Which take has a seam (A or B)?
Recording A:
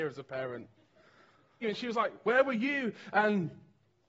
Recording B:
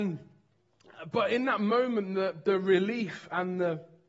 A